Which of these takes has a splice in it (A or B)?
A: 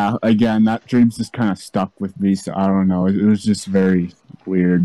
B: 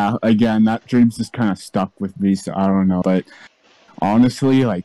B